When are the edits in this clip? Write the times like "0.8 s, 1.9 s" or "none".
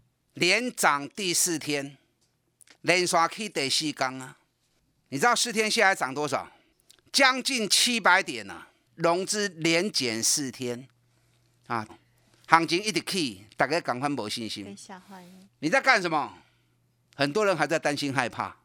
8.9 s, 11.9 s, 15.4 s